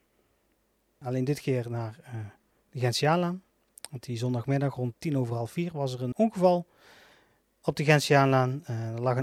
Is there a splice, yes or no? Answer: yes